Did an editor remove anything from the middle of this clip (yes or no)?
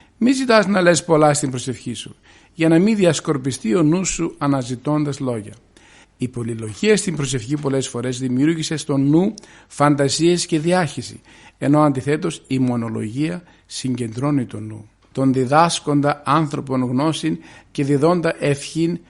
yes